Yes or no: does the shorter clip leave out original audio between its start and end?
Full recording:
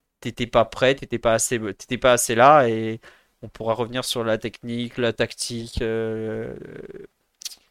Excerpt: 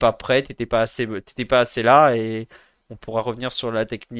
no